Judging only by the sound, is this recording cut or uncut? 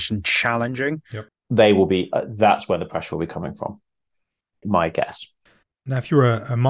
cut